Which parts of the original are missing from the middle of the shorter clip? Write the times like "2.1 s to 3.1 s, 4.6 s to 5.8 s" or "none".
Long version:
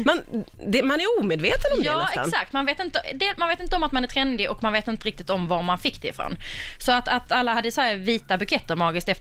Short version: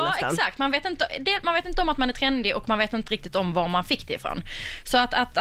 none

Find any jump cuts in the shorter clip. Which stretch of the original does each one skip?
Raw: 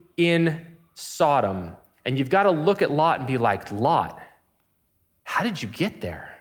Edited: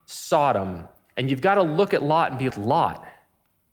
3.4 s to 3.6 s

